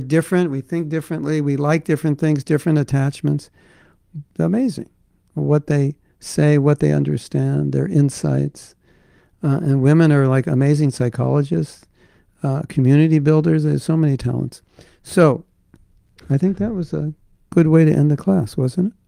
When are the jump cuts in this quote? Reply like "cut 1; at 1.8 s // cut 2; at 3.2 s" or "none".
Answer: cut 1; at 4.3 s